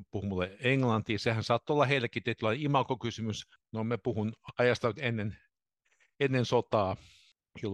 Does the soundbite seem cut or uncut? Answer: cut